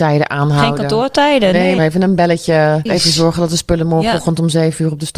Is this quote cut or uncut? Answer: cut